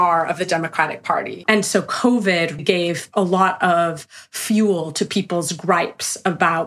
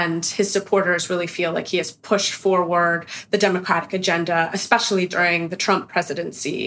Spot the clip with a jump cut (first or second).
first